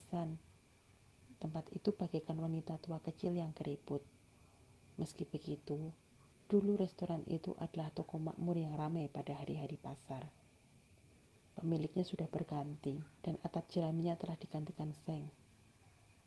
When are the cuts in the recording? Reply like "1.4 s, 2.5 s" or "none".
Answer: 13.2 s